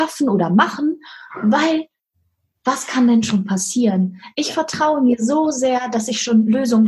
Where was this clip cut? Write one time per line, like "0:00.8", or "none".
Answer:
none